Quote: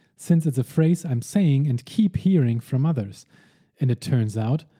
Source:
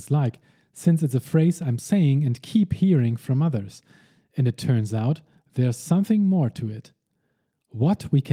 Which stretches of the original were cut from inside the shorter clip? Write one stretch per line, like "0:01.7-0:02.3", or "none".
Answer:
none